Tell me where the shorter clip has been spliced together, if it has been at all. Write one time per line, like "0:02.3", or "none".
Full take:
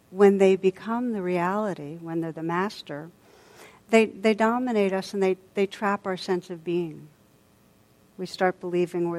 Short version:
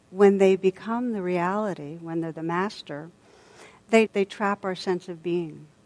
0:04.1